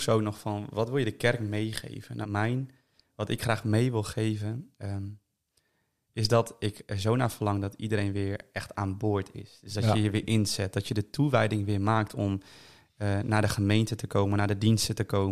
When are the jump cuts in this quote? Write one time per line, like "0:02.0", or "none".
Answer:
0:02.2